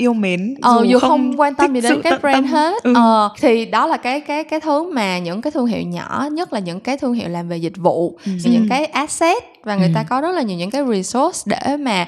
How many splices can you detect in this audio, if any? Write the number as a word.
two